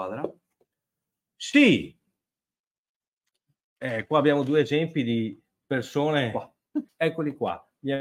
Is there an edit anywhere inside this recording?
yes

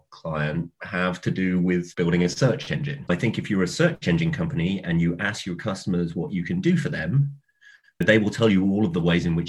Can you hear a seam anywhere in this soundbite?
no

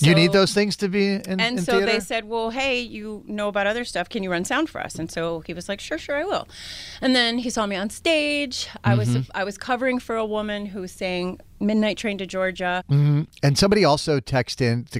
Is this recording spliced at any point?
yes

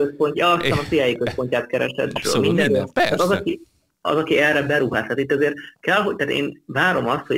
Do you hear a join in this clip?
yes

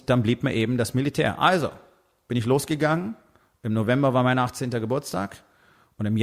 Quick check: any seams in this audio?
no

